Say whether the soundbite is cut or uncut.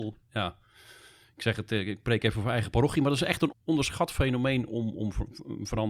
cut